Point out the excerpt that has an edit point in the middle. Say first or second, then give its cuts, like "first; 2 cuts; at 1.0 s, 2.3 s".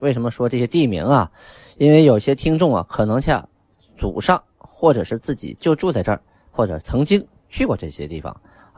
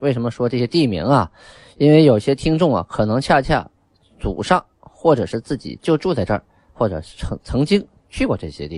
first; 2 cuts; at 3.2 s, 6.8 s